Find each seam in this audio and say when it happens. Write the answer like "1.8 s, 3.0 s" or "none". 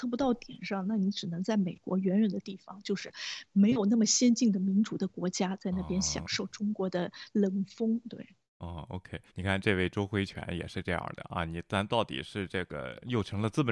9.3 s